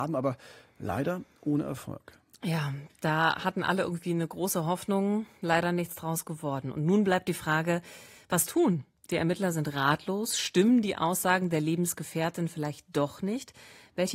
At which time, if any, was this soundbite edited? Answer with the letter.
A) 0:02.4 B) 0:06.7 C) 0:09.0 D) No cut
D